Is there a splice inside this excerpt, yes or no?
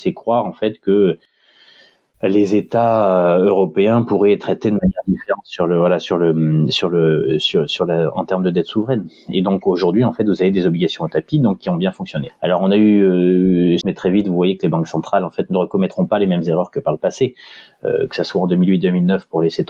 yes